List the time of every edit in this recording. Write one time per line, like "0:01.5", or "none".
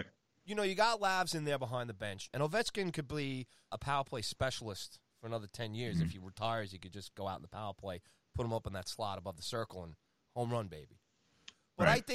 0:02.3
0:03.7